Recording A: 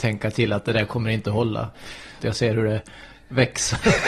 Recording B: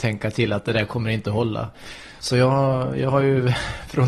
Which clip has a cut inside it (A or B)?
A